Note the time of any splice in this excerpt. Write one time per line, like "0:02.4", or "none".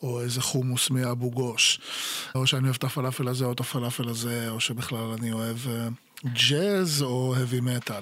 0:02.3